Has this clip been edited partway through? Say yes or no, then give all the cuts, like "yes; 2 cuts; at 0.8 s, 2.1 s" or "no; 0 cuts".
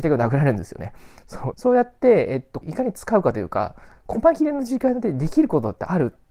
yes; 2 cuts; at 1.5 s, 2.6 s